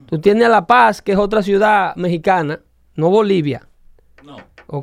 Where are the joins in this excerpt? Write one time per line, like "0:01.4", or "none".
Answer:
none